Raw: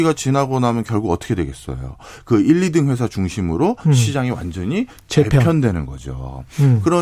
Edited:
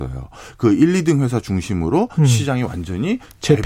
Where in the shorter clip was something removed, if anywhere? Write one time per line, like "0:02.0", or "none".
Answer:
none